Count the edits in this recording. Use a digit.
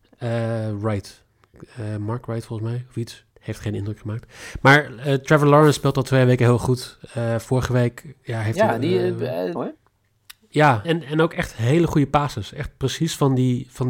3